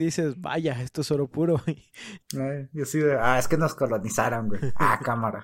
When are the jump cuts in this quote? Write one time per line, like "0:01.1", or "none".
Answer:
0:02.2